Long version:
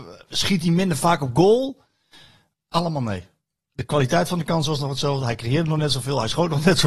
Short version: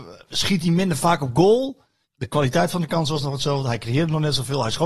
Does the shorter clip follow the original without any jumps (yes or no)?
no